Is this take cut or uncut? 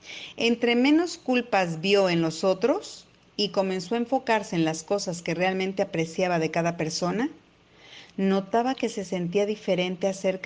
uncut